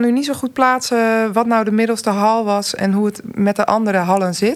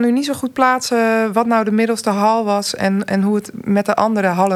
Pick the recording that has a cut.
first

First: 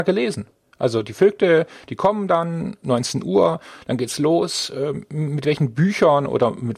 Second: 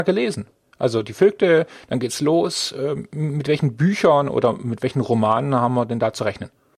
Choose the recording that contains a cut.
second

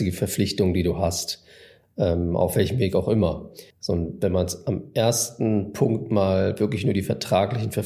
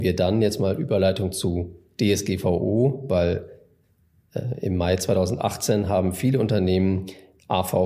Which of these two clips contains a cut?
first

